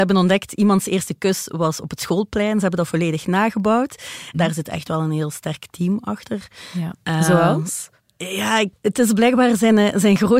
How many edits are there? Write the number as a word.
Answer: three